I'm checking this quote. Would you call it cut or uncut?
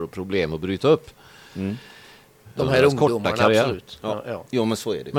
cut